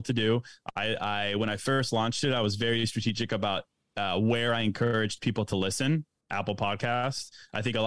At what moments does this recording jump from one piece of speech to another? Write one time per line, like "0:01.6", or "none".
none